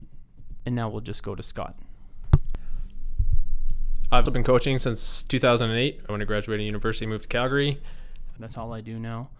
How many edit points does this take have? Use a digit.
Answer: 3